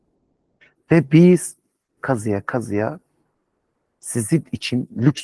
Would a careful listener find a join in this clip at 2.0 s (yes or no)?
yes